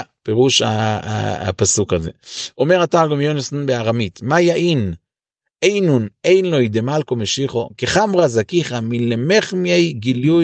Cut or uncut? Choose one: uncut